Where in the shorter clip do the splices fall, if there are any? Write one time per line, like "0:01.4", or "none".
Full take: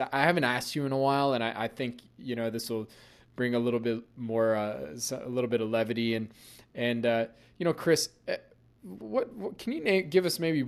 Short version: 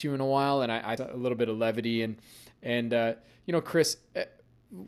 0:01.0